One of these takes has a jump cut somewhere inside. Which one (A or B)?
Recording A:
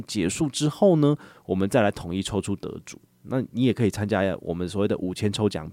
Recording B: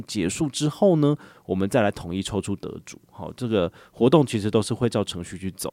A